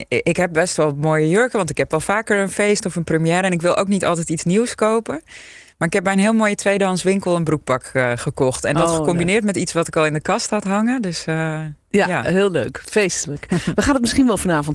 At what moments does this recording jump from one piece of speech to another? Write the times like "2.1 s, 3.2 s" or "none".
none